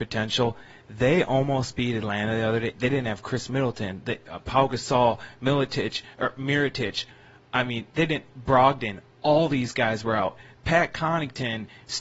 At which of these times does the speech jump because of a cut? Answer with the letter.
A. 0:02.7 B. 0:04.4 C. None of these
C